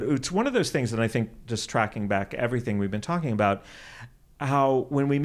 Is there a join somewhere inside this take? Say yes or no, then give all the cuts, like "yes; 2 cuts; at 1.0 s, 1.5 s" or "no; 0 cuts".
no; 0 cuts